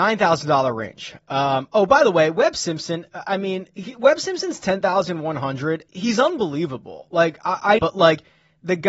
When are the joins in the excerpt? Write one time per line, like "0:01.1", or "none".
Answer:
0:05.9
0:07.8